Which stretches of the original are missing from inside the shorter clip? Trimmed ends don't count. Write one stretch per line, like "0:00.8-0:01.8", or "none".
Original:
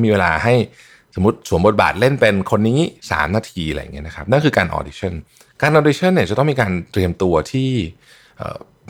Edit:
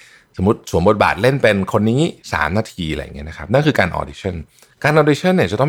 none